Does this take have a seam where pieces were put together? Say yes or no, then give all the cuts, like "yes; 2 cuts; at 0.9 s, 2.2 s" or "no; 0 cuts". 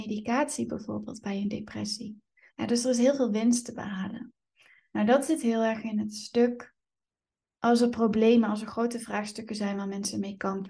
yes; 1 cut; at 2.5 s